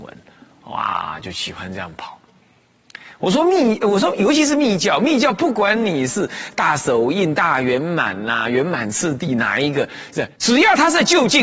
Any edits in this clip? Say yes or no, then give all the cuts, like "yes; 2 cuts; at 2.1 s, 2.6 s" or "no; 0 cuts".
yes; 1 cut; at 10.3 s